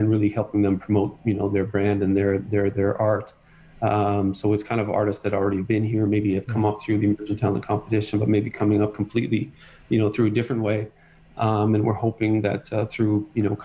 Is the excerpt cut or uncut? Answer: uncut